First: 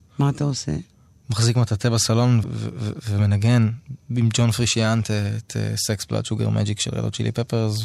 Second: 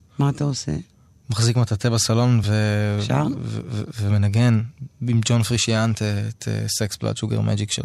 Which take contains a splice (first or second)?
first